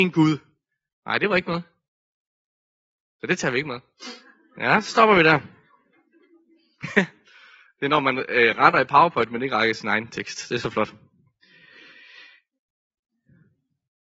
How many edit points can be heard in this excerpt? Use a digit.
1